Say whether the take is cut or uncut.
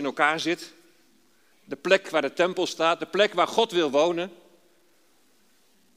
cut